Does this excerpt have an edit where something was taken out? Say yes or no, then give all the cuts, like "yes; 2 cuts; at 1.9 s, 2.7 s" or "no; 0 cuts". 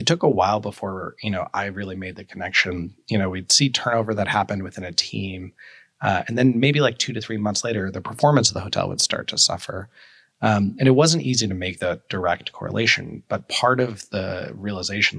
no; 0 cuts